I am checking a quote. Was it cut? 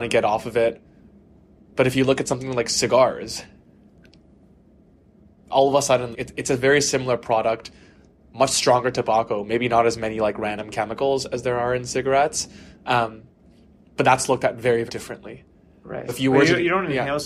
yes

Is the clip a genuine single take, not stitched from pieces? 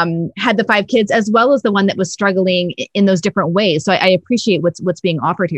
yes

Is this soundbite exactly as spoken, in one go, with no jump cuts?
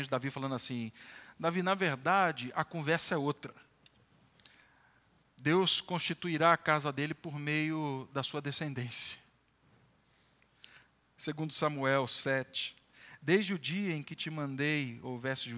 yes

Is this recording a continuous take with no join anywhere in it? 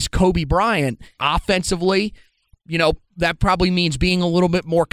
no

